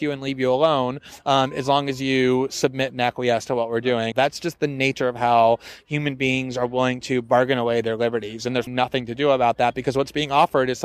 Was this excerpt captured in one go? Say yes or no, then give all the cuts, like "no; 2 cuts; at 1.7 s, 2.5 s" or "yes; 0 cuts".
no; 2 cuts; at 4.1 s, 8.7 s